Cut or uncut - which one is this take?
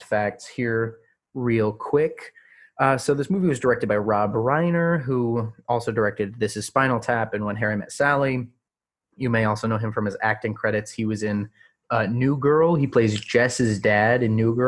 uncut